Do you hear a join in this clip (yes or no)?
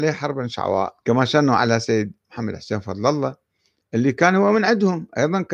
yes